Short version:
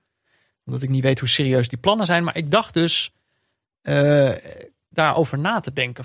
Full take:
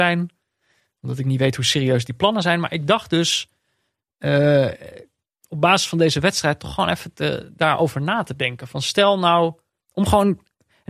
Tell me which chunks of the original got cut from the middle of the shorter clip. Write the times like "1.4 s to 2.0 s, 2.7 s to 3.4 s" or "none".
5.3 s to 7.5 s